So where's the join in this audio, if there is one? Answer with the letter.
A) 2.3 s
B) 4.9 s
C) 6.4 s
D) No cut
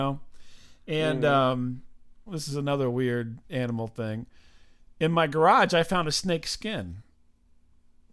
A